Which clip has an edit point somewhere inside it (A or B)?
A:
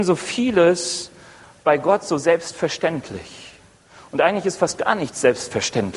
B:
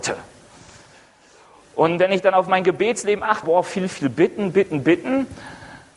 B